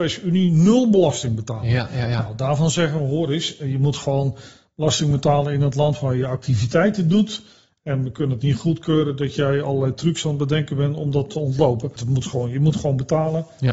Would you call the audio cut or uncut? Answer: cut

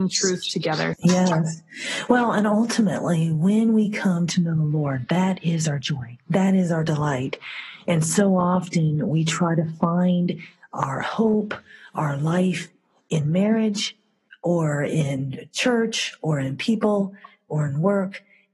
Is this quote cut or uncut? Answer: cut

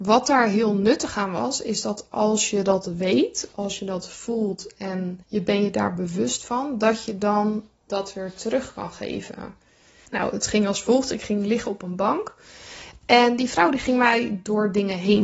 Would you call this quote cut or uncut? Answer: cut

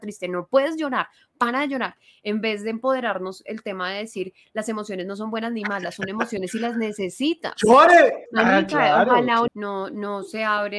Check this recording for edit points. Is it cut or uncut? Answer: cut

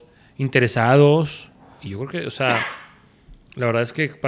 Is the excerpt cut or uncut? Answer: uncut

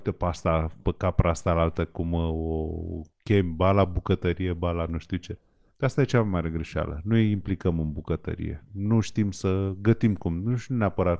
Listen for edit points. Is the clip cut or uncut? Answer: uncut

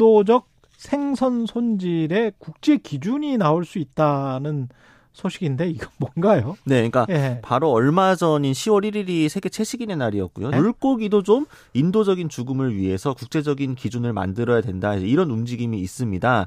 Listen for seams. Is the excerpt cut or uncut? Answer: cut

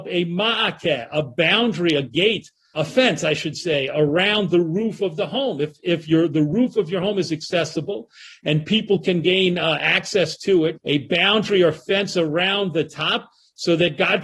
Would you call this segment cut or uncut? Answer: cut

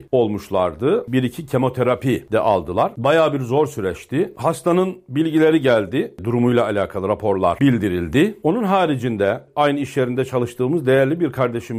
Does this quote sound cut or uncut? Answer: cut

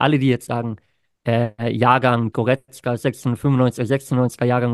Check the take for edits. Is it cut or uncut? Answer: cut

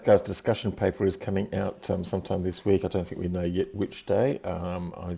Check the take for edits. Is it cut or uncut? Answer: uncut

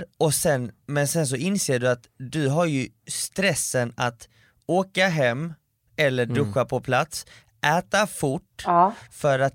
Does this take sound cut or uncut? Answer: uncut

